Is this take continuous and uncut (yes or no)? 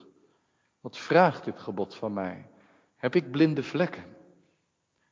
yes